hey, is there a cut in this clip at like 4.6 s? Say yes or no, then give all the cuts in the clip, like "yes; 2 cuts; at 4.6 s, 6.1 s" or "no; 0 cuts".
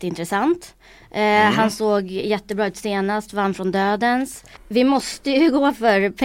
yes; 1 cut; at 4.6 s